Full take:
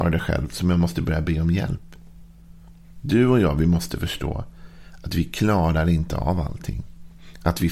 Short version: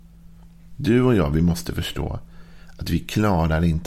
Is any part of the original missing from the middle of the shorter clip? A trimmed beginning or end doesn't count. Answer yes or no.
no